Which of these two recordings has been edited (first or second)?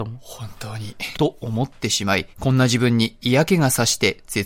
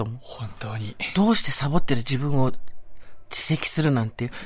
first